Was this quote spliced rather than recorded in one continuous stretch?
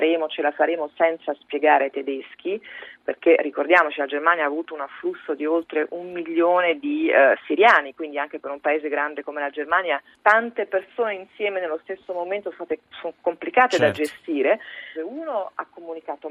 yes; 2 cuts; at 10.1 s, 14.9 s

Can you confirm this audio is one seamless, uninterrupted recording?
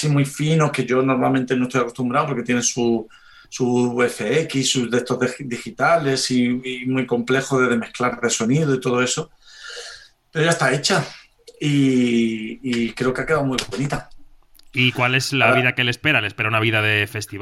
yes; 0 cuts

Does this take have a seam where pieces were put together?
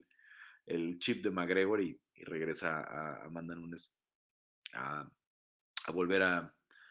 no; 0 cuts

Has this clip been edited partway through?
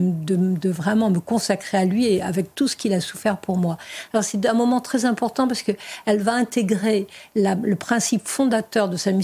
no; 0 cuts

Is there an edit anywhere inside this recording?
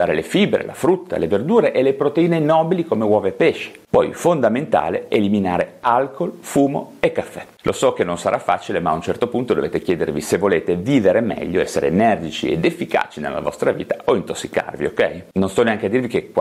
no; 0 cuts

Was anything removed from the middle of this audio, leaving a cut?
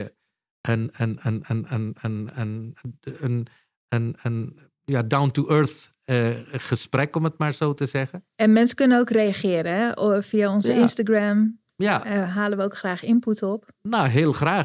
no; 0 cuts

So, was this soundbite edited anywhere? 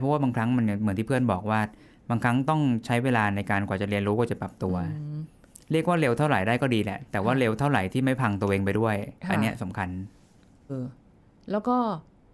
yes; 1 cut; at 10.7 s

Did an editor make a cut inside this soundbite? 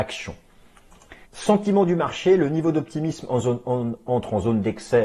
yes; 1 cut; at 1.2 s

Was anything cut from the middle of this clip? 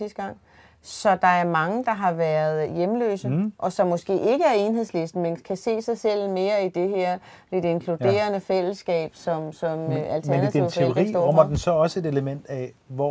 no; 0 cuts

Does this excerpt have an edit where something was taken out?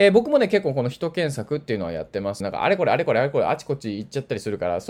yes; 1 cut; at 2.4 s

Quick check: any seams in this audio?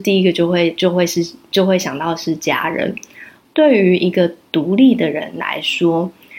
yes; 1 cut; at 3.5 s

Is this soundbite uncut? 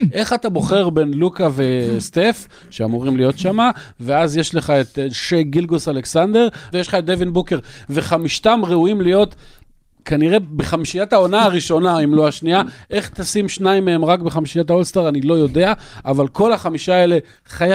no; 1 cut; at 6.7 s

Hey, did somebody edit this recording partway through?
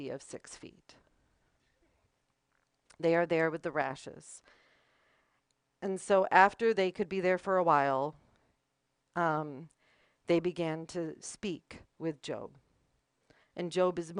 no; 0 cuts

